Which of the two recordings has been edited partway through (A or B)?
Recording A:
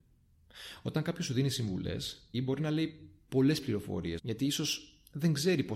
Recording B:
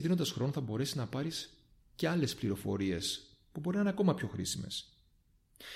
A